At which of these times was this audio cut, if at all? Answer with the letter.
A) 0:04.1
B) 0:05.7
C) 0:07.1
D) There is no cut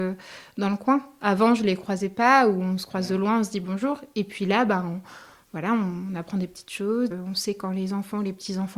C